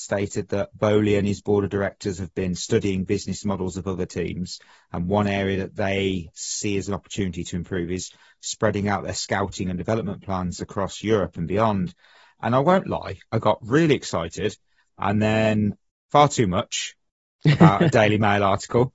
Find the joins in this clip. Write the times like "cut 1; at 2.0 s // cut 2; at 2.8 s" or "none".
none